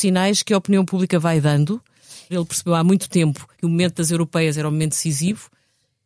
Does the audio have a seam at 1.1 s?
no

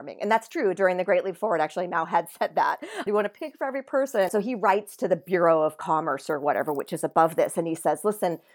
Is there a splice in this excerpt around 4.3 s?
yes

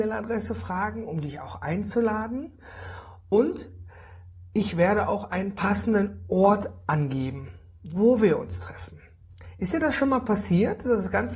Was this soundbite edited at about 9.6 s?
no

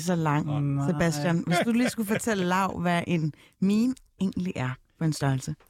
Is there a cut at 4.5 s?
no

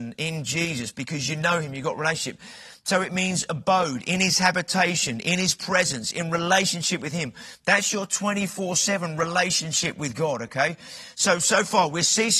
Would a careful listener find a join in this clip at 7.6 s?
no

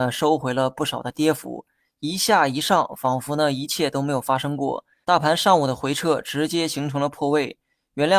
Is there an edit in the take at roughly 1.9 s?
no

